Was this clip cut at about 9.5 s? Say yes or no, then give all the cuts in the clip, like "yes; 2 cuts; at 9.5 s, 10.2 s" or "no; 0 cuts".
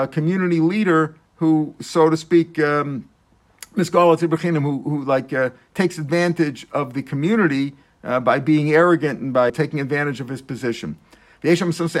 yes; 1 cut; at 9.5 s